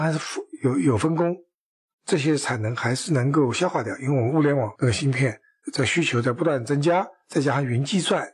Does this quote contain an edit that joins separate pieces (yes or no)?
yes